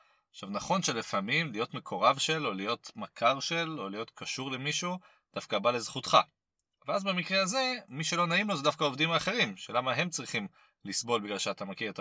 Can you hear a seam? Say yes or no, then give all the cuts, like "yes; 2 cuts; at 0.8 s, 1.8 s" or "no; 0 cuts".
no; 0 cuts